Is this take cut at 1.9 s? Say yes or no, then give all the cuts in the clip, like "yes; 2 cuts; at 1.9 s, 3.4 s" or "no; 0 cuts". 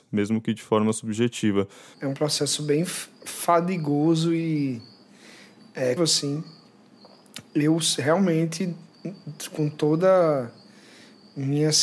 yes; 2 cuts; at 1.9 s, 6.0 s